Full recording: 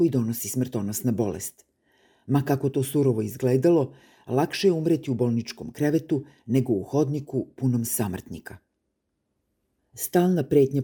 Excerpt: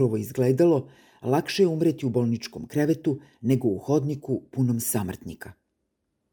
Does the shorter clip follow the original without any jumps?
yes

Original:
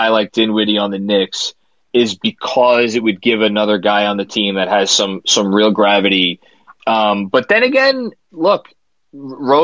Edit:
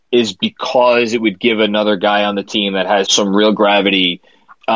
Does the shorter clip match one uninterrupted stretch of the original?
no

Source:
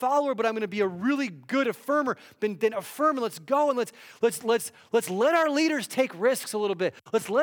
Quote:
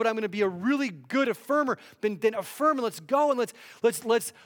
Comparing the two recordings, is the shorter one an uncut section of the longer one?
yes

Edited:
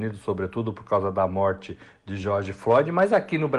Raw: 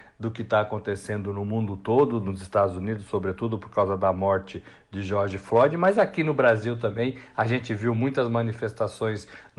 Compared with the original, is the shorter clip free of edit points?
yes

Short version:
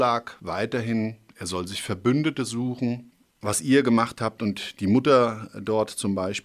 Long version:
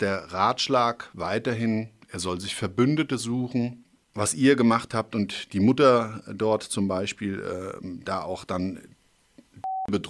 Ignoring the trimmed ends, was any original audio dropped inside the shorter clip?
no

